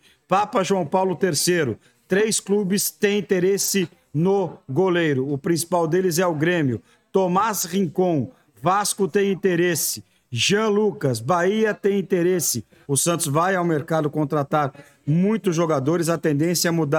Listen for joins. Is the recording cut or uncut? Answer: cut